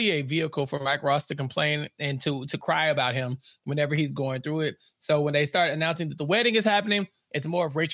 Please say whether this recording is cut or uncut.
uncut